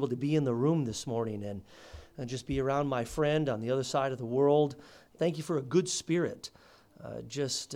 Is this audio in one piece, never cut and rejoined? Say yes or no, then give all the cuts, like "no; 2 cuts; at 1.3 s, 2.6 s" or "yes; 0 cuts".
no; 1 cut; at 5.2 s